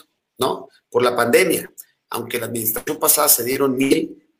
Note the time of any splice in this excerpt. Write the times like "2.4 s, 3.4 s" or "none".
2.0 s